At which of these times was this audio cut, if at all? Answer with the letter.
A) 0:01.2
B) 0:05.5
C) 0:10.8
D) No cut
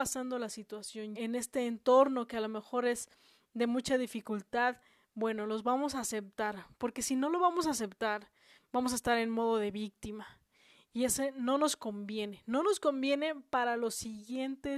A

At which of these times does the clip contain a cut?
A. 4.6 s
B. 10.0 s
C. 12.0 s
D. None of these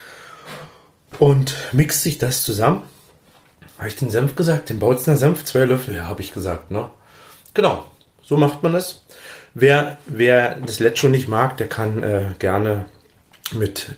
D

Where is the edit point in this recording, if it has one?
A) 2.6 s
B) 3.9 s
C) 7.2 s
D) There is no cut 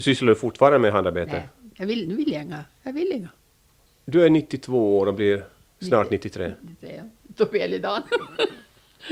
B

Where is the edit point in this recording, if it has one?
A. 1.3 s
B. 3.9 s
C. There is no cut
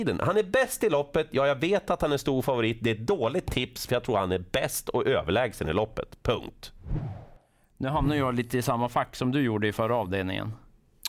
B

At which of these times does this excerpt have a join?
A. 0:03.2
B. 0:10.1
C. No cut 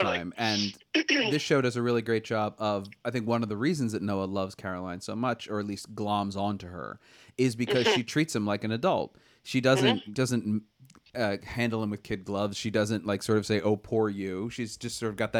B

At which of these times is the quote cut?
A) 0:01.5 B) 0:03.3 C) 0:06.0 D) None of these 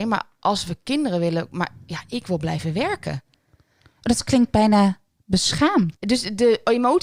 C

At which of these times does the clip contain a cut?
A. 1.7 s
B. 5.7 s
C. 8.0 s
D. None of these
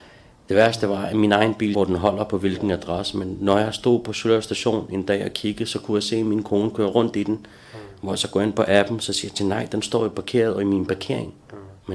A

